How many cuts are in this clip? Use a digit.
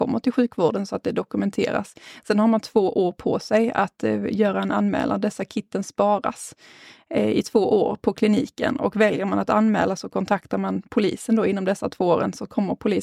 0